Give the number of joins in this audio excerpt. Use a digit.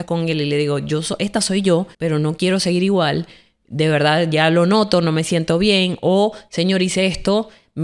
1